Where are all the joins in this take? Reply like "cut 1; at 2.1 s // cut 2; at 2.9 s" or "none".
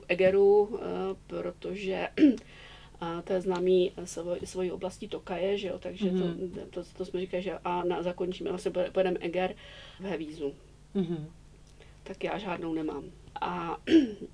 cut 1; at 10.0 s // cut 2; at 11.9 s // cut 3; at 13.3 s